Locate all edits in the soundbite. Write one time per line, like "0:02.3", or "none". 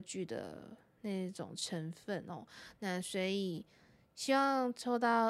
none

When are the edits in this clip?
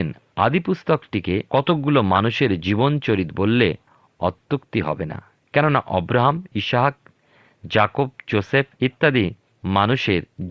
0:01.5
0:08.8

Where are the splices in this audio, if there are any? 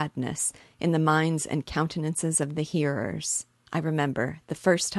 0:03.7

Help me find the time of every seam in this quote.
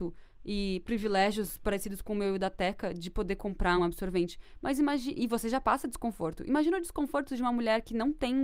0:03.8

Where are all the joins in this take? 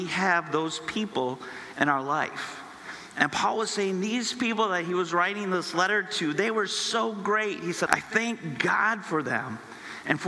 0:07.9

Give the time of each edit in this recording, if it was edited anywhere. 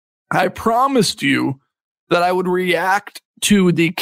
none

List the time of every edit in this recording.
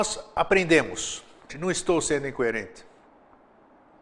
0:01.5

